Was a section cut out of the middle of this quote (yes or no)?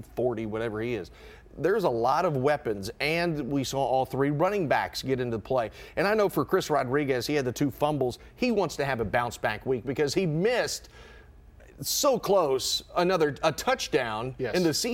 no